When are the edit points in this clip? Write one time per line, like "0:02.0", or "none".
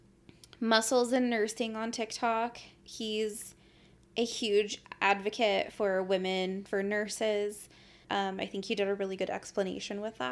0:06.7
0:08.0